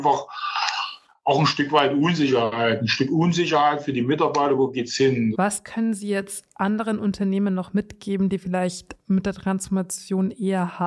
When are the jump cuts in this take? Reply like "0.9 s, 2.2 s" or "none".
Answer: 5.3 s